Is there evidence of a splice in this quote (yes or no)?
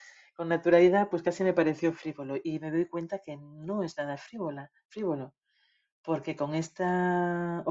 no